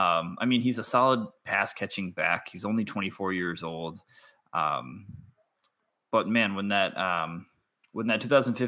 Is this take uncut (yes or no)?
yes